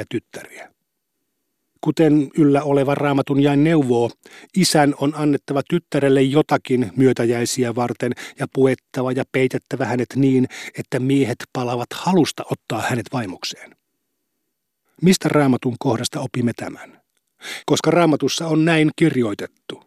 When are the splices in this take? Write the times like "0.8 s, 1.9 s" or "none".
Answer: 1.8 s, 14.9 s, 17.6 s